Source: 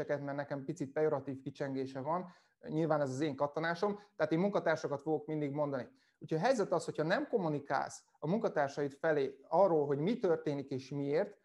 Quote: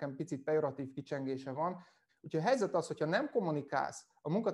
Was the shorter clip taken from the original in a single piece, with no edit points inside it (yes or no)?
no